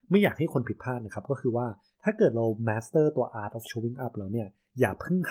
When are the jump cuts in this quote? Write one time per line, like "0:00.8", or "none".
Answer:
none